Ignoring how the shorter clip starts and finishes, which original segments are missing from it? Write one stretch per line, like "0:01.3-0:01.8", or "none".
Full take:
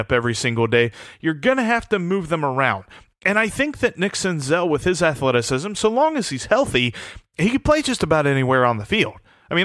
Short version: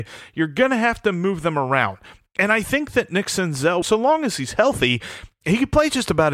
0:04.7-0:05.7